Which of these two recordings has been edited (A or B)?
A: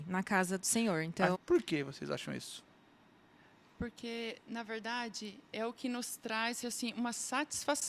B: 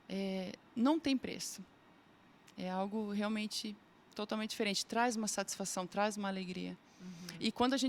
A